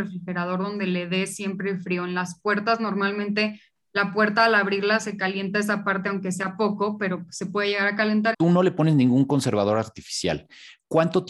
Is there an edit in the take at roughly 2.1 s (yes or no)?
no